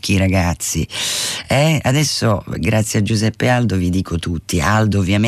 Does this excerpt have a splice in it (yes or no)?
no